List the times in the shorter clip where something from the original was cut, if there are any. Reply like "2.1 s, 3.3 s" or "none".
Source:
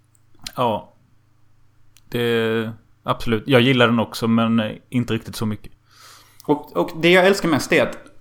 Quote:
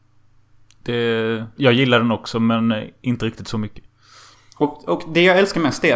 1.6 s